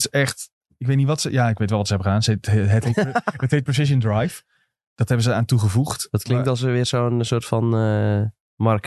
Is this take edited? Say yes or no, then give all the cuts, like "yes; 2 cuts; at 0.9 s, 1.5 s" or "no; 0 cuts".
no; 0 cuts